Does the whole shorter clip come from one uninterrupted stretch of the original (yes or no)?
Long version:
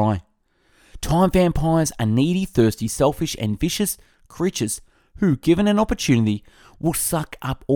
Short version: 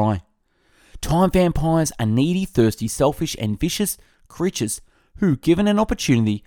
yes